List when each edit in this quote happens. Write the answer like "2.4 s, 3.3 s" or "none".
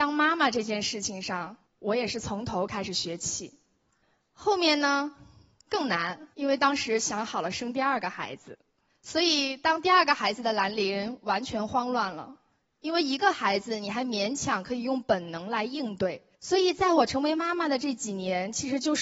6.3 s, 16.3 s